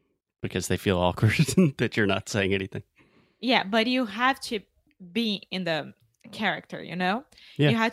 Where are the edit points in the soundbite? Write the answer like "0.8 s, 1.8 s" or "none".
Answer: none